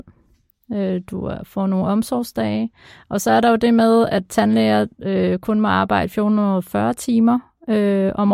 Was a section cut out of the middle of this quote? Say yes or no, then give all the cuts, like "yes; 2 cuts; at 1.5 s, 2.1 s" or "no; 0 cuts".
no; 0 cuts